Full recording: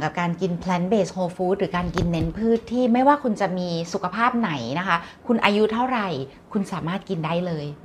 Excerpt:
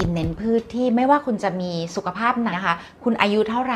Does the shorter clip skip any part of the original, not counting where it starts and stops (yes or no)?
yes